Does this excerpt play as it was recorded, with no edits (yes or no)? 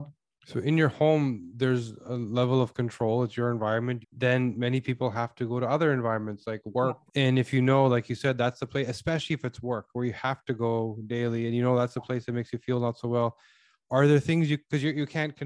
no